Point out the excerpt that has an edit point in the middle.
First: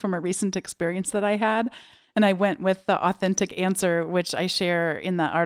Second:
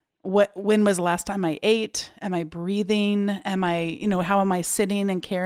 first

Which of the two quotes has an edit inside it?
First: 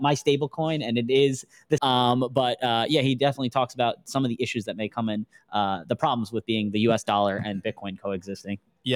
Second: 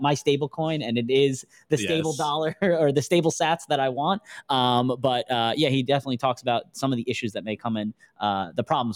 first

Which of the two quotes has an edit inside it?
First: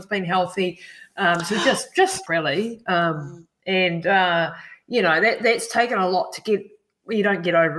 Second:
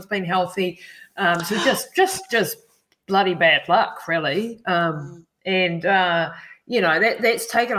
first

